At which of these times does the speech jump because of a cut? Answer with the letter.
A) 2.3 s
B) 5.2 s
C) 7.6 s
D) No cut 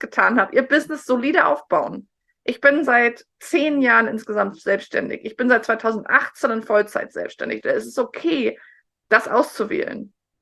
C